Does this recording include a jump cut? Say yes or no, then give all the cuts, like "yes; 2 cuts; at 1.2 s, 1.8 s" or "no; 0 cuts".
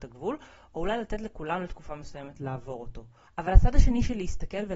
yes; 1 cut; at 3.3 s